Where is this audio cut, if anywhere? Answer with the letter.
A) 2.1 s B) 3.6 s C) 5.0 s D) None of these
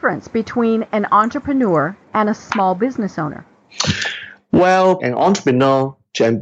C